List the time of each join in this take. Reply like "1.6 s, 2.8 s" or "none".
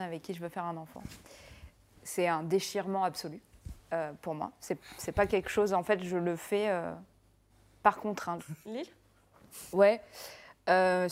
8.4 s